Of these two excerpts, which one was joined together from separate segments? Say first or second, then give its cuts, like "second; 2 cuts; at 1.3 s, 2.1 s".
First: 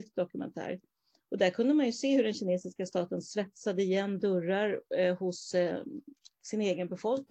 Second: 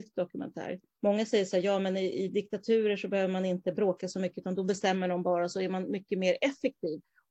second; 1 cut; at 0.9 s